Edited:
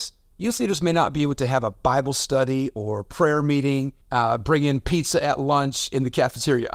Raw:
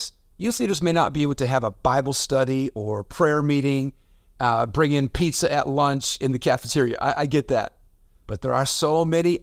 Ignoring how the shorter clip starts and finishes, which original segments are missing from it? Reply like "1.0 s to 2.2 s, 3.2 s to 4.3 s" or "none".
4.0 s to 4.3 s